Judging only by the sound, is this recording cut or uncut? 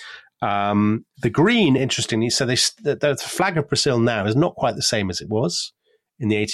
uncut